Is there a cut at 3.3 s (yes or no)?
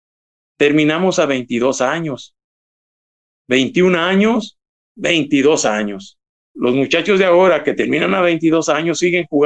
no